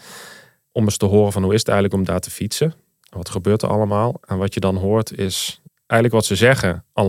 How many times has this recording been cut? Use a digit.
1